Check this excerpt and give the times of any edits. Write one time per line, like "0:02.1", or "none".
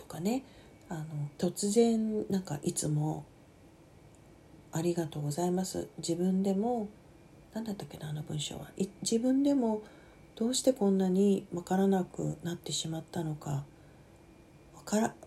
0:01.3